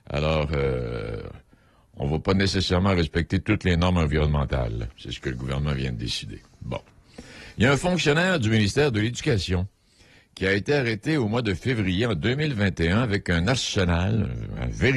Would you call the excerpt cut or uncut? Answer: uncut